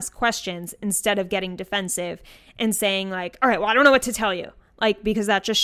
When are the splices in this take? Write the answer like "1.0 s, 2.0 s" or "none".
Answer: none